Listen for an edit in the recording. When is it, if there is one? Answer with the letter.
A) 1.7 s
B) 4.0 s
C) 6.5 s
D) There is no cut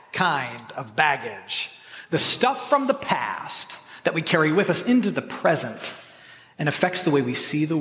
D